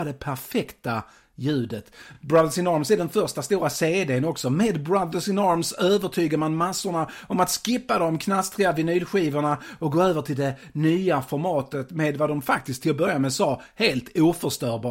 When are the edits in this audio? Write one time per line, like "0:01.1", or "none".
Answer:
none